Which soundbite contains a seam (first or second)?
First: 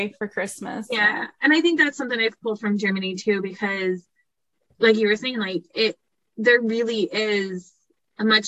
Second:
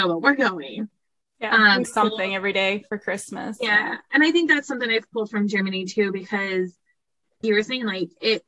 second